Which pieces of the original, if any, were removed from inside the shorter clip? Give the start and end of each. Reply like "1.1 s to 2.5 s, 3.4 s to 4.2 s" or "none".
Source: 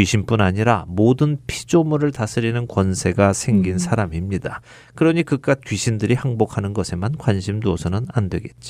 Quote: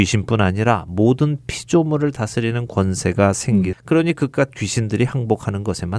3.7 s to 4.8 s